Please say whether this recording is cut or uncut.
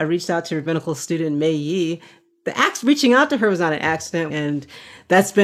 cut